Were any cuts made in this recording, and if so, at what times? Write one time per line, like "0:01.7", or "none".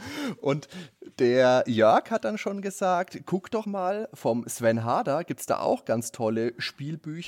0:03.6

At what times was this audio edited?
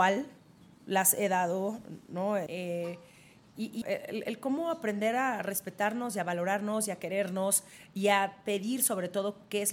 0:02.5
0:03.8

